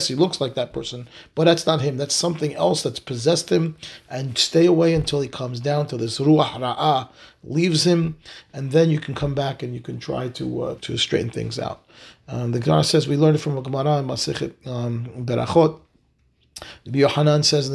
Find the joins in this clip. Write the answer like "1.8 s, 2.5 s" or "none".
10.8 s